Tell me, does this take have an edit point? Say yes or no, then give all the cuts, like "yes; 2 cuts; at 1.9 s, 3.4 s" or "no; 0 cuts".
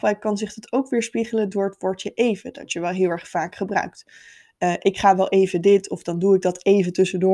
no; 0 cuts